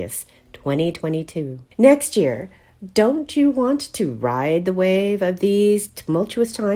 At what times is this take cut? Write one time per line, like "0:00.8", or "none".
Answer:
0:01.7

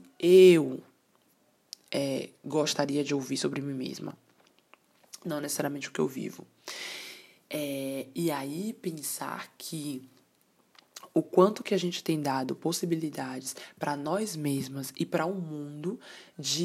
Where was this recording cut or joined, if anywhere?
none

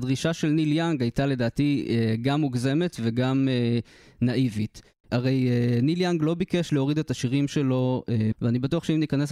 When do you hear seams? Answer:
0:05.0
0:08.3

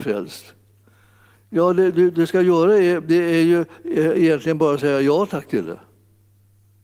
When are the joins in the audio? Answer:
none

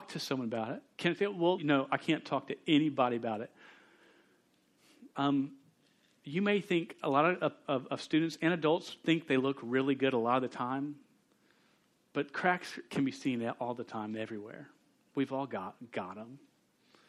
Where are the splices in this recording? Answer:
0:01.6
0:05.1
0:07.6

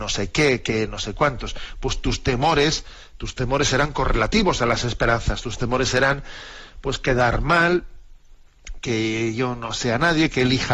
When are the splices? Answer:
none

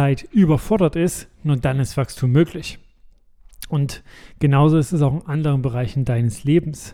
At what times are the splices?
none

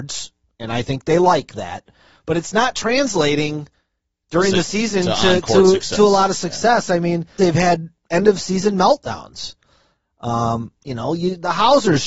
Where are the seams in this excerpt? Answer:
0:07.4

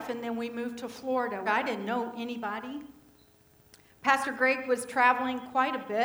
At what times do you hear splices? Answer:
0:01.5

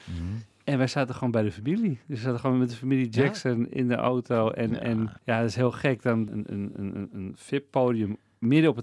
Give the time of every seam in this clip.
0:05.2
0:06.3

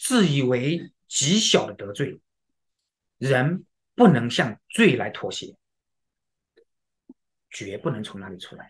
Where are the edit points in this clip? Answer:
0:03.2
0:07.4

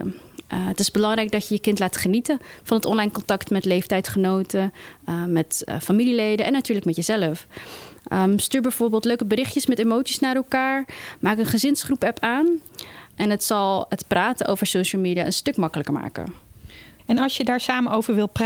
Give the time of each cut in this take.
0:13.1
0:17.0

